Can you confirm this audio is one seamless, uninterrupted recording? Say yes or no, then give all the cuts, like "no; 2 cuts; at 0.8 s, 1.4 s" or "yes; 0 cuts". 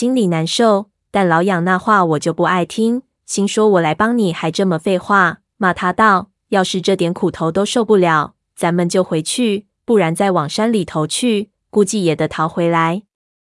yes; 0 cuts